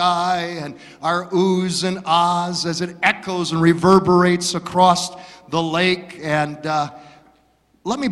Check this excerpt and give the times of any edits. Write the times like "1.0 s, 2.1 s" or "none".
none